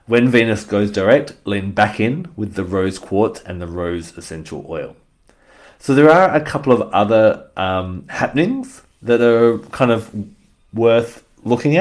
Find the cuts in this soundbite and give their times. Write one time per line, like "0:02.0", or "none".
none